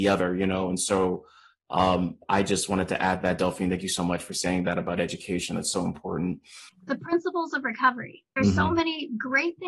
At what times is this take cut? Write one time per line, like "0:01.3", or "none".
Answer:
0:06.7
0:08.4

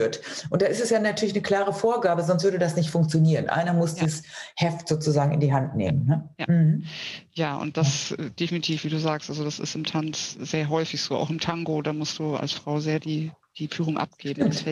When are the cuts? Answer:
none

